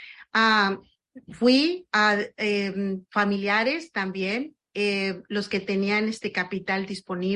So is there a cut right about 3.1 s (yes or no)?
yes